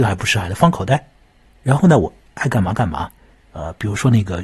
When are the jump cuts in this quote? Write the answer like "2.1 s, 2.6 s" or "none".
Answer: 3.3 s